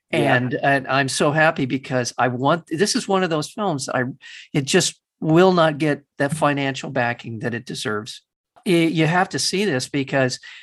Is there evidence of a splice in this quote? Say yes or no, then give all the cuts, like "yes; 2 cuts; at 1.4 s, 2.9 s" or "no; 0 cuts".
no; 0 cuts